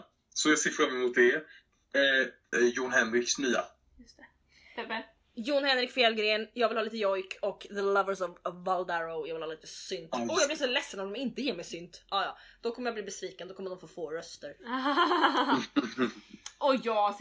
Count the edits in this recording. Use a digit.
1